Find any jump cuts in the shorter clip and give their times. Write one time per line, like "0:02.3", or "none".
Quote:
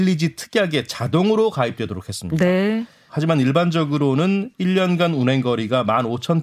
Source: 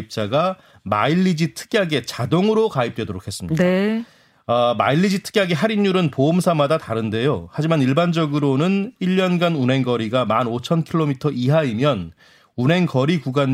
0:03.1